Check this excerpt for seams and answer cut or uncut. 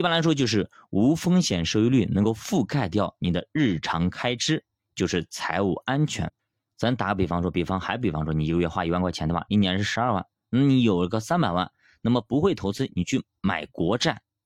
uncut